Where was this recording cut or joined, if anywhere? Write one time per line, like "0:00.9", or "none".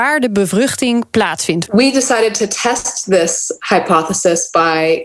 0:01.7